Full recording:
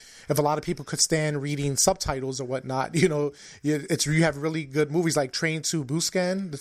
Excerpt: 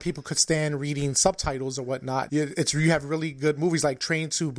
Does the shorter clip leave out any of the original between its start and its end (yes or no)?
yes